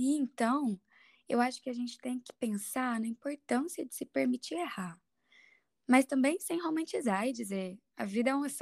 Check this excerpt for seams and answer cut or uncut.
uncut